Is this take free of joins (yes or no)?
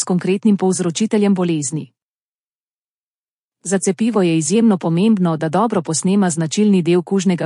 yes